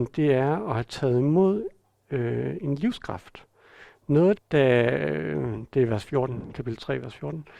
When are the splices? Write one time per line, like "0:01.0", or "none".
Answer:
0:02.6
0:04.4